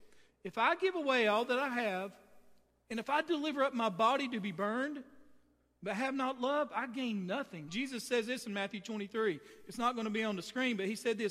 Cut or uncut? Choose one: cut